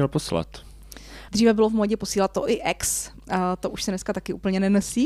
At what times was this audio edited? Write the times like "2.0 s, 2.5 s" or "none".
1.3 s